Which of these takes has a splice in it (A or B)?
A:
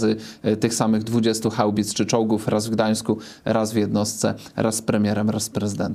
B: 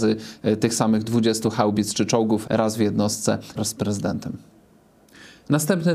B